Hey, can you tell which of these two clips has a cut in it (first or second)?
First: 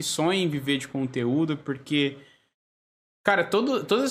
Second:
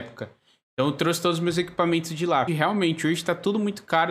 second